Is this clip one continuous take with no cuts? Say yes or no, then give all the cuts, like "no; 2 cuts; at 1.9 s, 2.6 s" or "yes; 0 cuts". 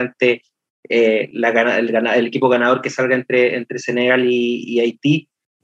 yes; 0 cuts